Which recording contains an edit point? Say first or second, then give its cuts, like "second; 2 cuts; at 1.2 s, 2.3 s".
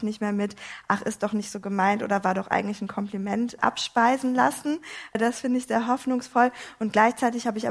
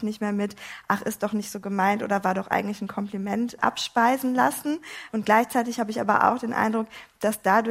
second; 1 cut; at 5.1 s